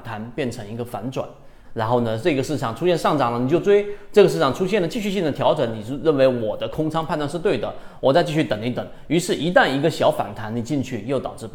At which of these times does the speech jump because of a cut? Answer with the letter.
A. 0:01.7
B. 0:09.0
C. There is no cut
A